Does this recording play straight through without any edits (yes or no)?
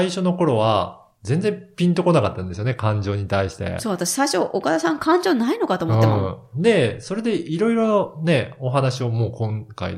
no